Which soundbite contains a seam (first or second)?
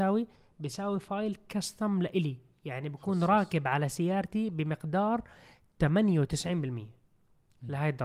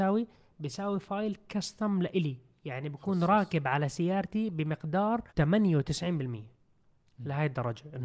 second